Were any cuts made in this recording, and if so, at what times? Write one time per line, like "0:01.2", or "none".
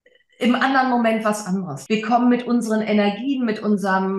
0:01.9